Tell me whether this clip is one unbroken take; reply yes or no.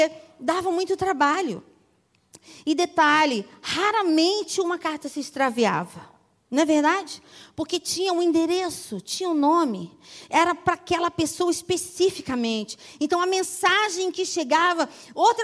yes